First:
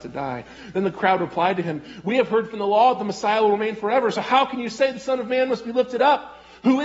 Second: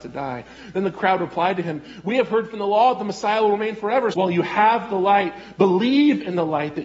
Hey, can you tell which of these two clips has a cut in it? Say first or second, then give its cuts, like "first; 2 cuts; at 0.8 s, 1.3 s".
second; 1 cut; at 4.1 s